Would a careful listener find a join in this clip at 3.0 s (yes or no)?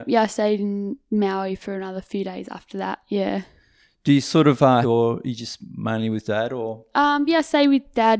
no